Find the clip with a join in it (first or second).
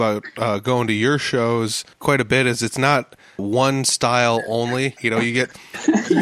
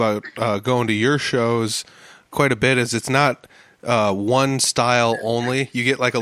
first